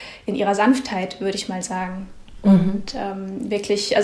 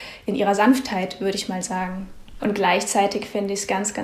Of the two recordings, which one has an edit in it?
second; 1 cut; at 2.4 s

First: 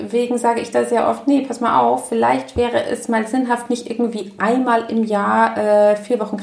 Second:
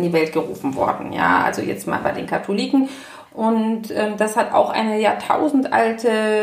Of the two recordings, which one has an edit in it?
second; 1 cut; at 3.3 s

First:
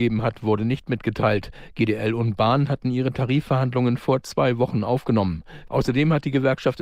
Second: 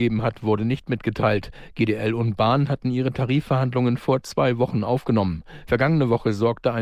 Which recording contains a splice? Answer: first; 1 cut; at 5.7 s

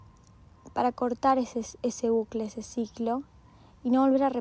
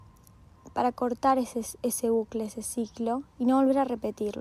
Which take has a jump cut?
second; 1 cut; at 3.3 s

